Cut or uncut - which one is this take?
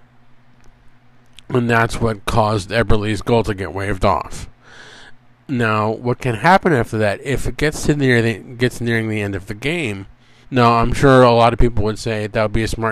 cut